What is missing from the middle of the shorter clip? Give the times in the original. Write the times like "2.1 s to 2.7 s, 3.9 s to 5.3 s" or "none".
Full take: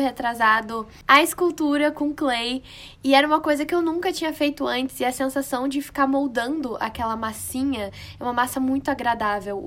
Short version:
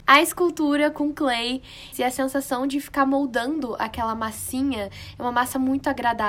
2.9 s to 4.9 s